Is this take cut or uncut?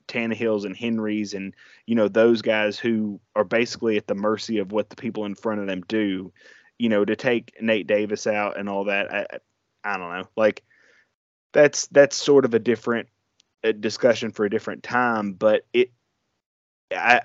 uncut